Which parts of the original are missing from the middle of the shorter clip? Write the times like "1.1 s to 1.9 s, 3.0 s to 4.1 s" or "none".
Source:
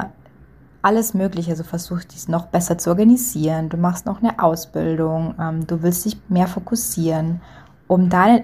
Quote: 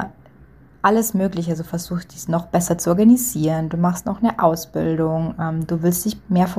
none